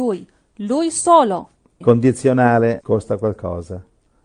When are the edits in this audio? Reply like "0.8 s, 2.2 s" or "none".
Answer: 1.8 s, 2.8 s